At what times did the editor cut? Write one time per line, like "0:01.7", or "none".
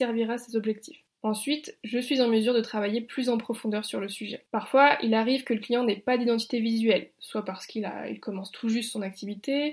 none